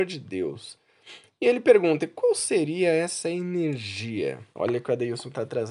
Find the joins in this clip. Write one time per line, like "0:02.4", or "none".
0:04.5